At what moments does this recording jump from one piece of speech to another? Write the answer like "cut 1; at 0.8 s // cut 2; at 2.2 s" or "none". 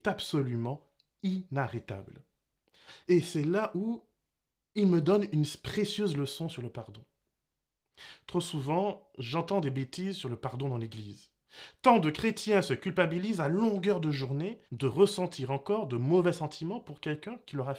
cut 1; at 3.1 s // cut 2; at 14.7 s